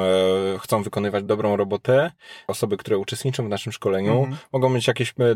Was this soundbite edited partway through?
yes; 2 cuts; at 1.3 s, 2.5 s

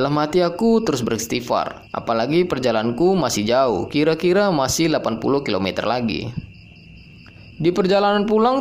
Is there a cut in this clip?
yes; 2 cuts; at 1.9 s, 7.5 s

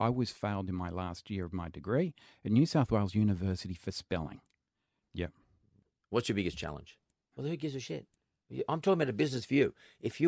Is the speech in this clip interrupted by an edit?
yes; 2 cuts; at 5.0 s, 7.3 s

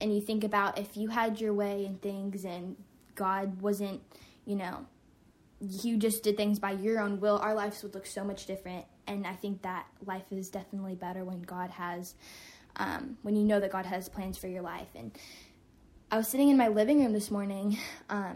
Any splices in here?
no; 0 cuts

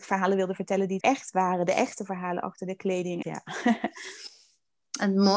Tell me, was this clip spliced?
yes; 2 cuts; at 1.0 s, 3.2 s

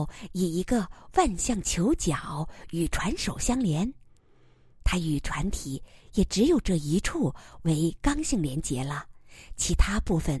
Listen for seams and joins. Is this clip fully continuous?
yes; 0 cuts

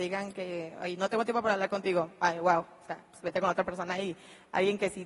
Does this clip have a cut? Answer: no; 0 cuts

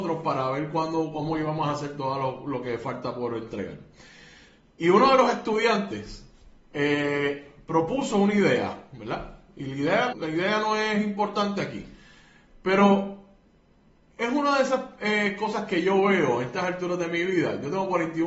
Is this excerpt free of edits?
no; 1 cut; at 10.1 s

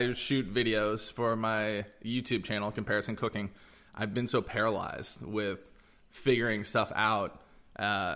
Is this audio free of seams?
yes; 0 cuts

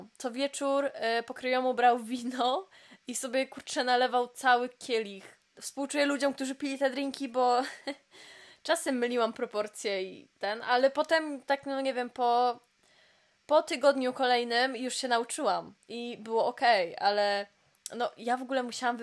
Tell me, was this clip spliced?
yes; 1 cut; at 5.5 s

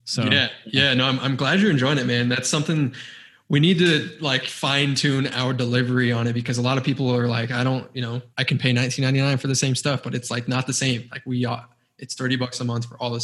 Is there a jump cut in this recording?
yes; 1 cut; at 8.3 s

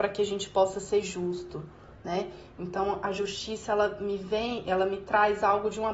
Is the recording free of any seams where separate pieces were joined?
yes; 0 cuts

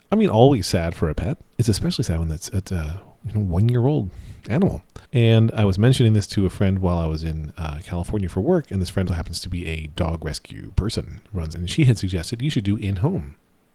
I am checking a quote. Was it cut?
yes; 3 cuts; at 5.0 s, 9.1 s, 11.5 s

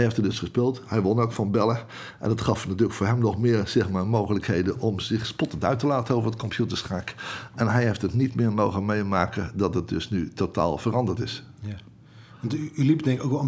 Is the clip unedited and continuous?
yes; 0 cuts

